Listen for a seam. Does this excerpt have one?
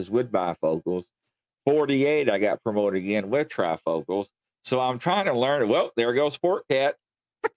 no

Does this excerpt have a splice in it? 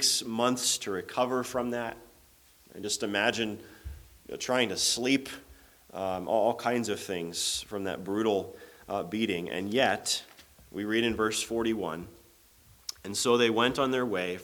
no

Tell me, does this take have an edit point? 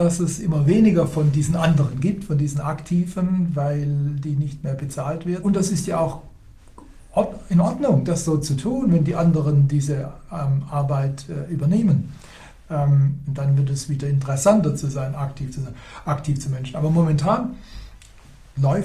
yes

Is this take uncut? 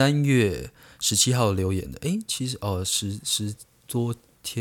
yes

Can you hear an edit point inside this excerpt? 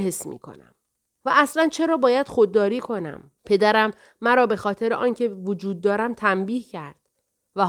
yes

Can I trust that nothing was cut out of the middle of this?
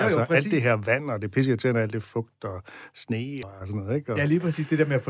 no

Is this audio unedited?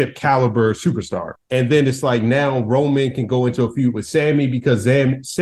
no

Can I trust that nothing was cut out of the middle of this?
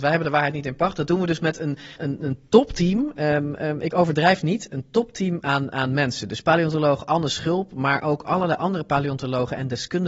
no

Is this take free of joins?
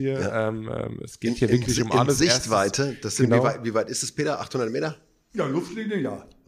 yes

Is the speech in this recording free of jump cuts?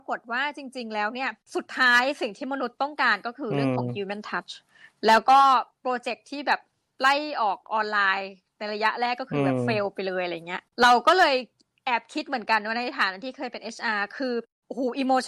yes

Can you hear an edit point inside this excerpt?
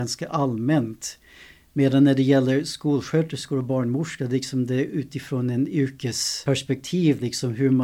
no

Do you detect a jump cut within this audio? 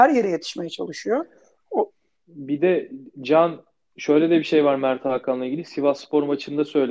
no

